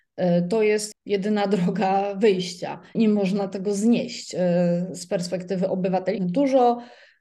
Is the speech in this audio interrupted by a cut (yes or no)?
yes